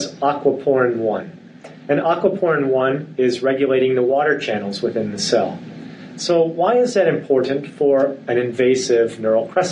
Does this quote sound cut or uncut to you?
uncut